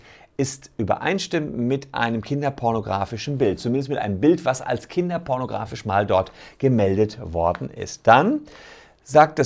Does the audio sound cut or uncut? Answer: uncut